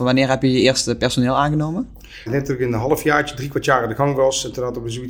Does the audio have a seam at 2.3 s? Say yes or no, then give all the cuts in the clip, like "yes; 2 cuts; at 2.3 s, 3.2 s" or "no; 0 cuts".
yes; 1 cut; at 2.3 s